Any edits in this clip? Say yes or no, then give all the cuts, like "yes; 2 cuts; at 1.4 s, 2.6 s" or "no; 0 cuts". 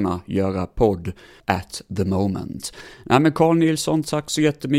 yes; 1 cut; at 1.4 s